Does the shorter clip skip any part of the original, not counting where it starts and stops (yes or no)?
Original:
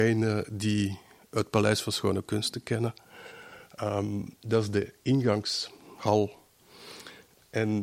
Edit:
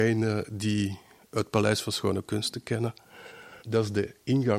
yes